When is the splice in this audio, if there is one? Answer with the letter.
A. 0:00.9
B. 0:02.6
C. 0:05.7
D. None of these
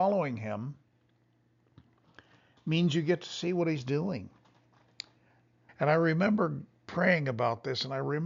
C